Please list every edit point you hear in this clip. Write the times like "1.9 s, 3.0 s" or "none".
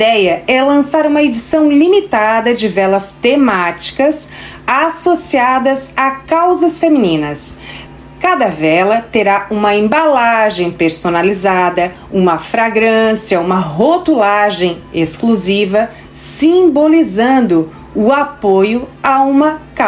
none